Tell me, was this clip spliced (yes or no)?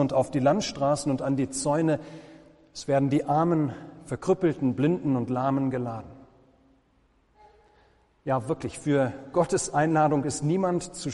no